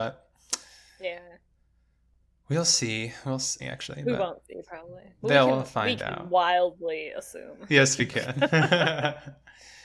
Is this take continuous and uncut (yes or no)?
no